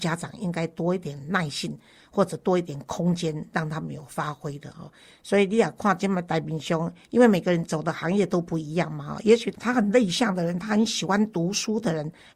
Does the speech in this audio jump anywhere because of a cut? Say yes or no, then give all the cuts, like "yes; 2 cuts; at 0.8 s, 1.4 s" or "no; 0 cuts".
no; 0 cuts